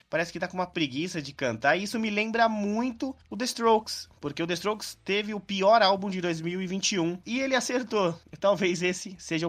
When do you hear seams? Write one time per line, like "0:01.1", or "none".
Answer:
0:07.2